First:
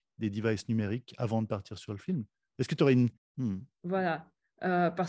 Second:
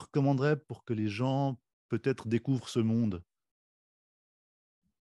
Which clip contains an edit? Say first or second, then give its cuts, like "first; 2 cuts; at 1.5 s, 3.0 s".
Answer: first; 1 cut; at 3.2 s